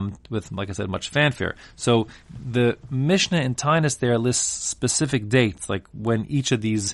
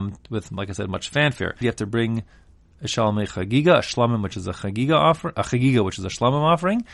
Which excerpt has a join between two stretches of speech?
second; 1 cut; at 1.6 s

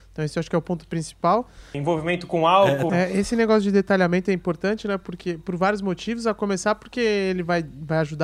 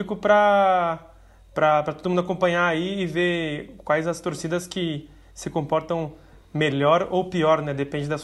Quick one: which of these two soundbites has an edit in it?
first; 2 cuts; at 1.7 s, 2.9 s

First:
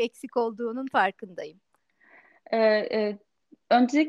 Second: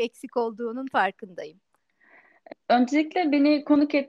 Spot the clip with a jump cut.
second; 1 cut; at 2.5 s

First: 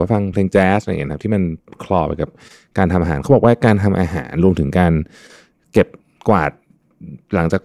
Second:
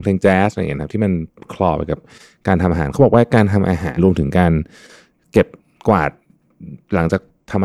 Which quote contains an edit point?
second; 1 cut; at 4.0 s

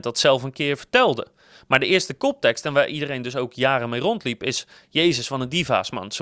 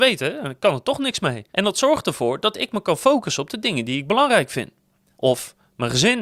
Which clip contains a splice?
second; 2 cuts; at 1.5 s, 5.1 s

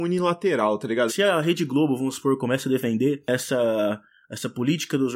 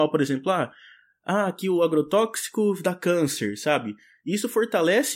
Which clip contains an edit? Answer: first; 1 cut; at 1.1 s

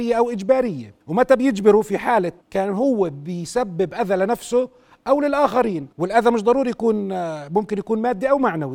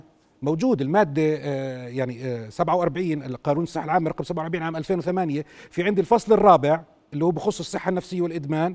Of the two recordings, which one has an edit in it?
first; 3 cuts; at 1.0 s, 2.4 s, 5.9 s

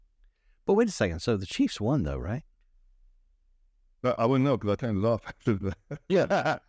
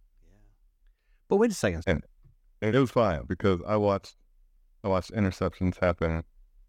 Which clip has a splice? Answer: second; 1 cut; at 1.8 s

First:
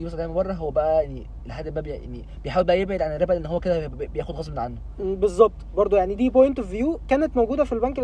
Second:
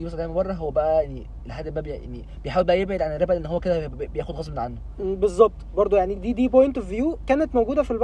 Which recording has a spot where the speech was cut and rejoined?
first; 1 cut; at 6.2 s

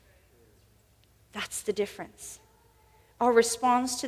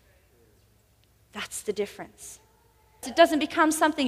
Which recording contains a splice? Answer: second; 1 cut; at 3.0 s

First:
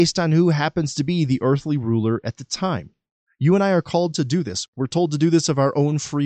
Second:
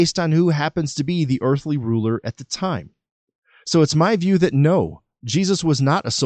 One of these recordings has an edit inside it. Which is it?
first; 2 cuts; at 3.3 s, 4.7 s

